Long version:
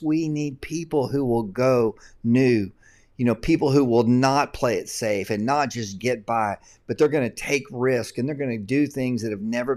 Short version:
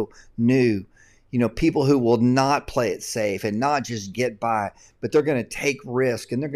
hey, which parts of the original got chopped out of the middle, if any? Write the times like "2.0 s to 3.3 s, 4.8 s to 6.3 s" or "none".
none